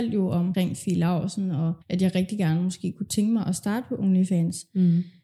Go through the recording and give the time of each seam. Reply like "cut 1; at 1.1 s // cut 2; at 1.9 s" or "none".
cut 1; at 1.8 s